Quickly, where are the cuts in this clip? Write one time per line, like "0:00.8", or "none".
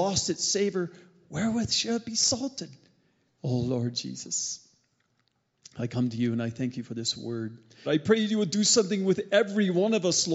0:03.4
0:07.8